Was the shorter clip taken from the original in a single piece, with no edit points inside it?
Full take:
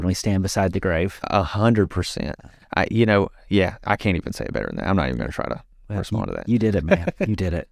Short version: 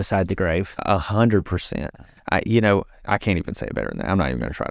no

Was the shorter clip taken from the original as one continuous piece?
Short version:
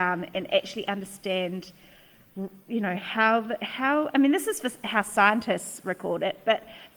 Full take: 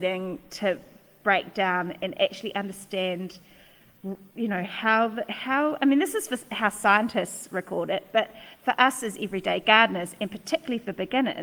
yes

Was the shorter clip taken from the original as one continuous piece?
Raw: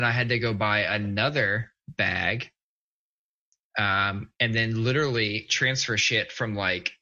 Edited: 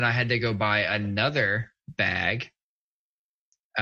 yes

